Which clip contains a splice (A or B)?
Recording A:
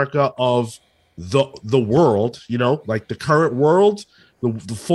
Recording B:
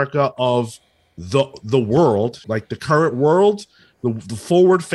B